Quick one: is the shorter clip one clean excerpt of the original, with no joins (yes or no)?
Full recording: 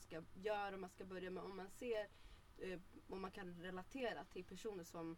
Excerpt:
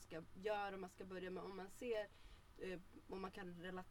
yes